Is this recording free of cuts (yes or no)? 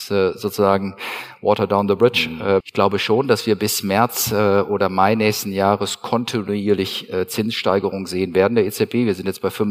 no